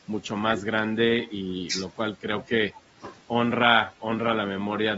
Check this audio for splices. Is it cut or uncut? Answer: uncut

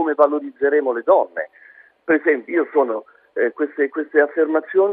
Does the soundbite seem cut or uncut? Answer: uncut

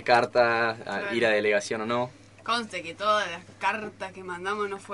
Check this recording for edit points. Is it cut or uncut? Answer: uncut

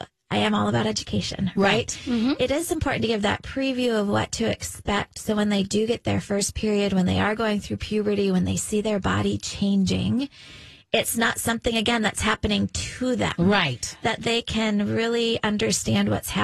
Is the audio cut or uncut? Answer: uncut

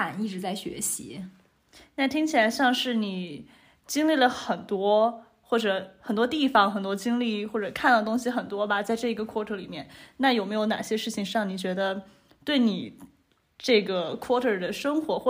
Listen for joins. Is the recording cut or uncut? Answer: uncut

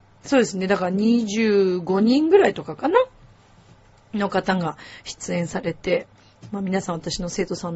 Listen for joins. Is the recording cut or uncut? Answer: uncut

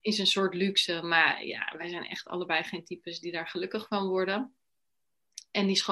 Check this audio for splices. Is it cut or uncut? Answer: uncut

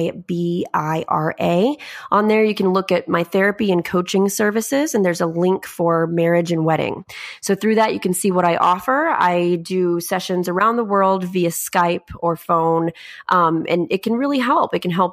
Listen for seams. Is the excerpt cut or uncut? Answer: uncut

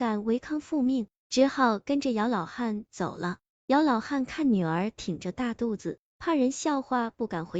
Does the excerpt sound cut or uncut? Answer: uncut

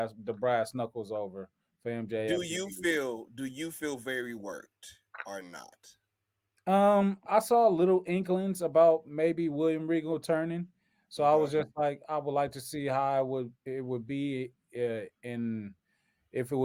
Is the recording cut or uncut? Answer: uncut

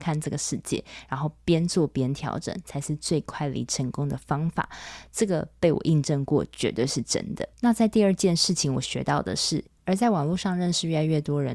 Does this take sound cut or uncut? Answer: cut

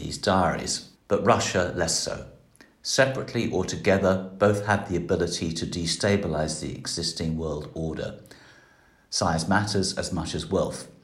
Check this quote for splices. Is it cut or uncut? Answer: cut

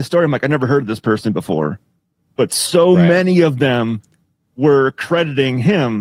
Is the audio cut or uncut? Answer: uncut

